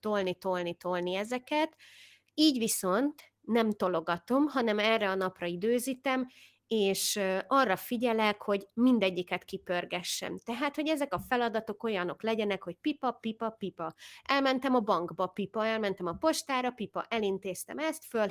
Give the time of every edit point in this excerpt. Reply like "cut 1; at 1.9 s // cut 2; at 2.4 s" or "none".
none